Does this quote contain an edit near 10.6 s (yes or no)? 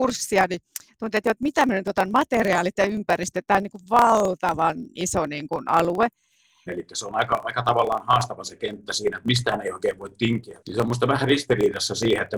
yes